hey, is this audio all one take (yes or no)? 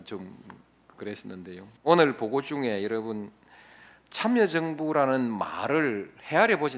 no